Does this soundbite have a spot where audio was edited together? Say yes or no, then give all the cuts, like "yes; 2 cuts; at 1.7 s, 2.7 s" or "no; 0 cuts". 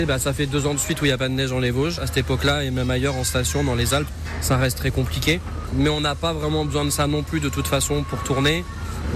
no; 0 cuts